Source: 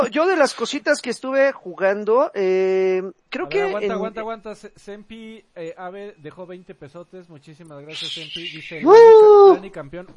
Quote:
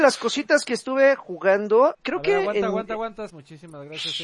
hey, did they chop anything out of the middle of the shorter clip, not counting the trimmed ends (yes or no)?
yes